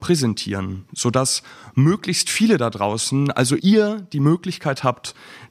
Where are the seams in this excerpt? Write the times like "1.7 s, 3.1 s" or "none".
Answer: 3.6 s

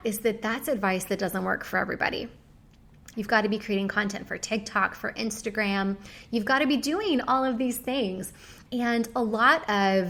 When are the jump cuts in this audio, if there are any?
3.1 s, 6.3 s, 8.7 s

